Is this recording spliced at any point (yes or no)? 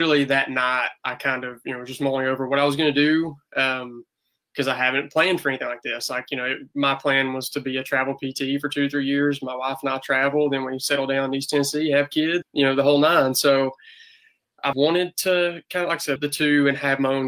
yes